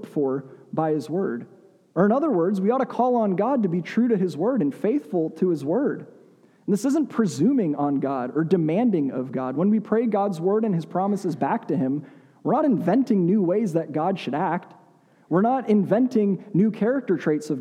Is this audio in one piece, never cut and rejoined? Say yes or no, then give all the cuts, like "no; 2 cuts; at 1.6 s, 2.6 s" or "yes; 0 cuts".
yes; 0 cuts